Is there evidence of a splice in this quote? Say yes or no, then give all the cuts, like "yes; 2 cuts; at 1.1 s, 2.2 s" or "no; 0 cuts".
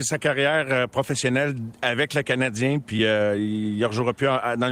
no; 0 cuts